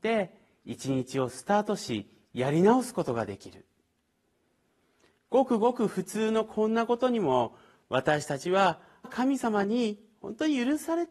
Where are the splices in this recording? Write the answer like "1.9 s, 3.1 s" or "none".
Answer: 9.0 s